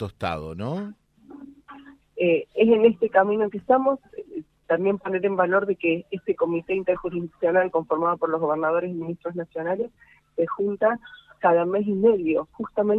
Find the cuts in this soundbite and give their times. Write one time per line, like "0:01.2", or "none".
0:02.0
0:07.7